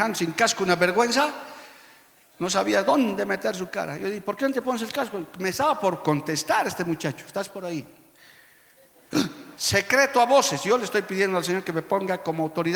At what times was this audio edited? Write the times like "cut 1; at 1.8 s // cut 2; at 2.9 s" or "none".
cut 1; at 9.6 s